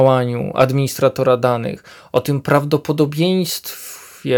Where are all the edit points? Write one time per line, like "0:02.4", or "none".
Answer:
none